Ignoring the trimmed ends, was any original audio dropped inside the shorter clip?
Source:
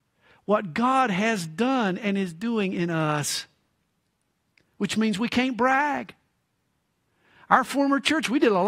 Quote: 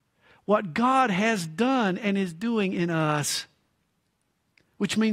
no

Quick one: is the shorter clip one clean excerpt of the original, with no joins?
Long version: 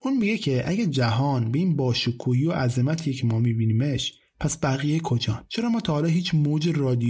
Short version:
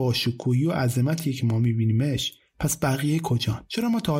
yes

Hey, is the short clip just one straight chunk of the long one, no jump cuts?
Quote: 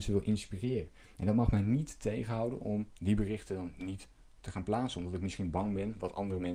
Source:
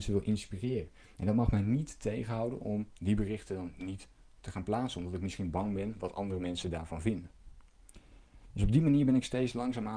yes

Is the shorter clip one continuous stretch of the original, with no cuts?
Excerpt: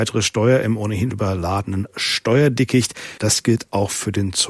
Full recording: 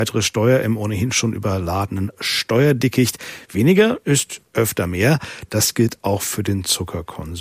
no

